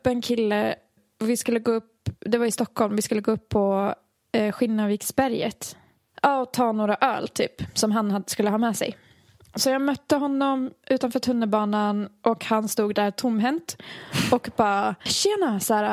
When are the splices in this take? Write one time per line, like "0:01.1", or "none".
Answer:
none